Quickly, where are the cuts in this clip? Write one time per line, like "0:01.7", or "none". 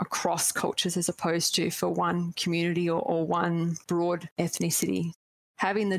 none